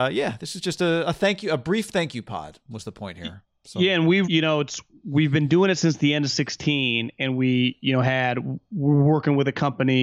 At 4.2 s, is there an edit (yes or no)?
yes